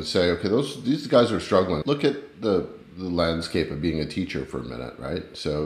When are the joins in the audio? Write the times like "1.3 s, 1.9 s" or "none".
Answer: 1.8 s